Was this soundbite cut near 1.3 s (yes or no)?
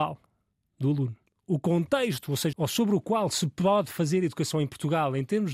yes